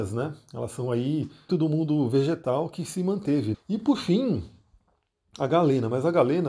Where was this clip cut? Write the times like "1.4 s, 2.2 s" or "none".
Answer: 1.5 s, 3.5 s